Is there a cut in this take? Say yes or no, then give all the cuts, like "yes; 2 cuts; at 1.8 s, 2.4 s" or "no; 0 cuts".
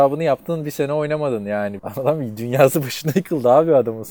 yes; 1 cut; at 1.8 s